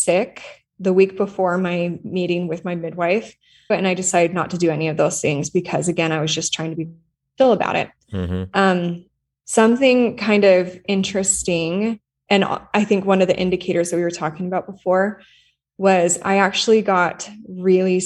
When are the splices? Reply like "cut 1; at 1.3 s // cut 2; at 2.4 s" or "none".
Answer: cut 1; at 3.7 s